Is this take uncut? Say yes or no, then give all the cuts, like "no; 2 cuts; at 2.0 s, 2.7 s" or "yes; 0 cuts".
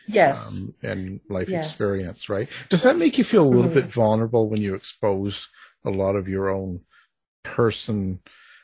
yes; 0 cuts